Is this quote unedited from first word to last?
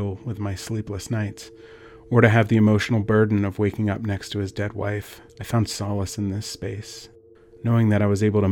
no; 1 cut; at 5.3 s

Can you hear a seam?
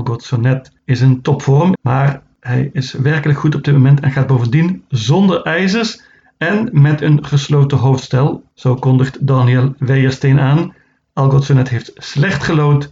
yes; 1 cut; at 1.8 s

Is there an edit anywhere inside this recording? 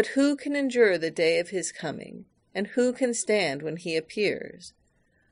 no; 0 cuts

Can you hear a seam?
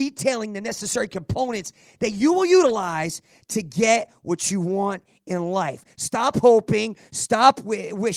no; 0 cuts

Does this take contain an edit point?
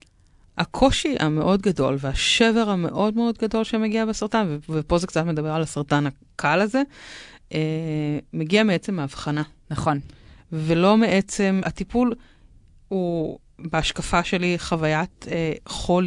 yes; 1 cut; at 11.6 s

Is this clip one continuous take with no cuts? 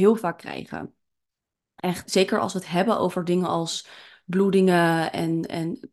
no; 1 cut; at 2.0 s

